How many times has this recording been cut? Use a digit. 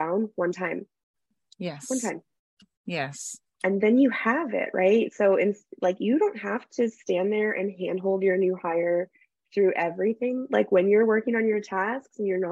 1